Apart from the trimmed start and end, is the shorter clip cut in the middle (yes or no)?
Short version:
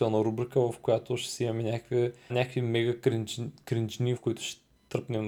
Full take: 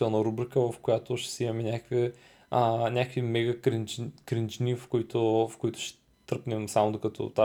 yes